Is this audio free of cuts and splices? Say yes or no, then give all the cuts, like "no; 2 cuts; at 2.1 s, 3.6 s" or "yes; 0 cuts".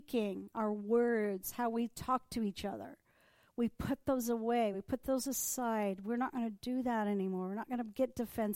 yes; 0 cuts